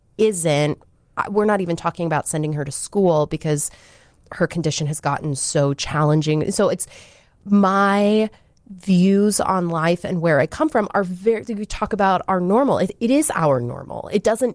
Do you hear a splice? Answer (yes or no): no